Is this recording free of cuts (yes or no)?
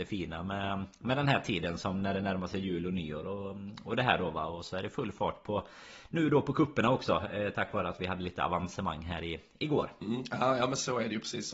yes